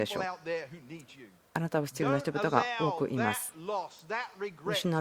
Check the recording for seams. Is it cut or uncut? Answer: uncut